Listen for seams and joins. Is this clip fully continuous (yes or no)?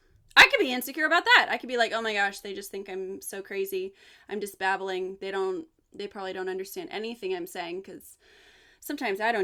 yes